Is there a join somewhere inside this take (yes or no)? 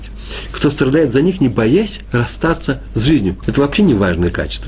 yes